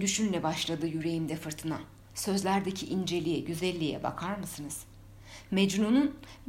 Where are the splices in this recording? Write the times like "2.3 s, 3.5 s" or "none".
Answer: 2.1 s